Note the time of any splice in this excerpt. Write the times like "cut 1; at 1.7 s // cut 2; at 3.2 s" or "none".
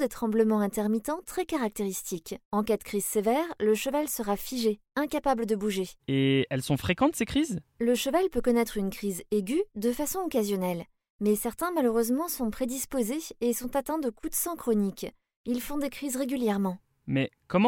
cut 1; at 2.4 s // cut 2; at 6.0 s